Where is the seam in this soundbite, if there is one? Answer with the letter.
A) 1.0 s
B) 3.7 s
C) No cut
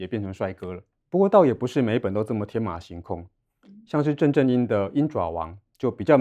A